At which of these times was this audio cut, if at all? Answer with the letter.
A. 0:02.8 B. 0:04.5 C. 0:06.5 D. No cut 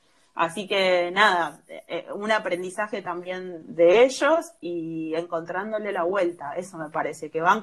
D